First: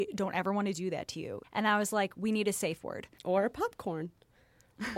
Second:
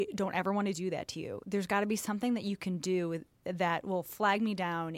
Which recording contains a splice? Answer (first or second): first